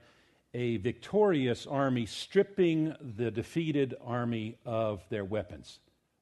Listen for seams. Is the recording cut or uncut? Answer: uncut